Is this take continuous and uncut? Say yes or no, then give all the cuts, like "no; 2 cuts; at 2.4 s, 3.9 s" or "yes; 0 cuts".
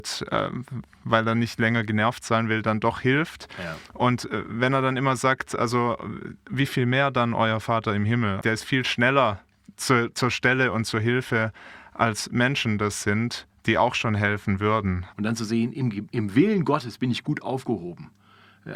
no; 2 cuts; at 8.4 s, 15.1 s